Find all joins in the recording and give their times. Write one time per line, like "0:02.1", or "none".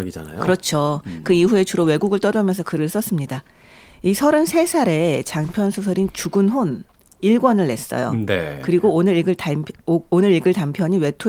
none